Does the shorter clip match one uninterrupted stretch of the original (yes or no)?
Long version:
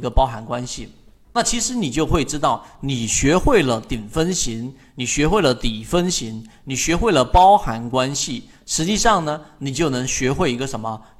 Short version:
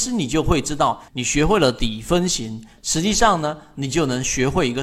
no